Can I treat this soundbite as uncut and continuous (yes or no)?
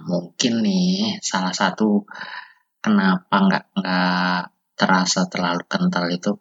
yes